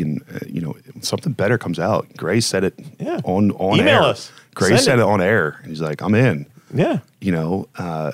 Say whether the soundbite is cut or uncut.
uncut